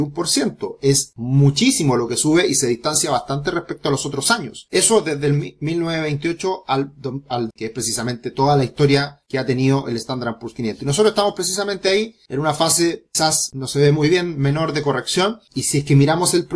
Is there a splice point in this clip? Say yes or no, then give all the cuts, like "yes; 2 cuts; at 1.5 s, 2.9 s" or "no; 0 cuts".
yes; 1 cut; at 7.5 s